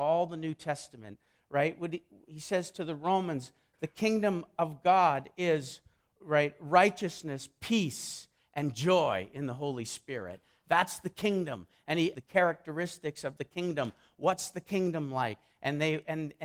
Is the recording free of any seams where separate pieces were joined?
no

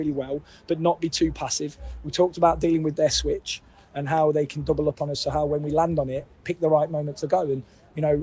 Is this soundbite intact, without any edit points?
yes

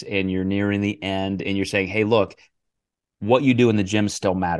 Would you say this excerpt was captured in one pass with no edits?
yes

